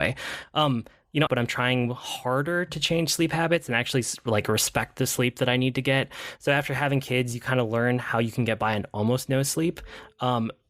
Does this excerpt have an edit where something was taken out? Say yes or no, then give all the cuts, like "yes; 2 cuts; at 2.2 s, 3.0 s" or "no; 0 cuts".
yes; 1 cut; at 1.3 s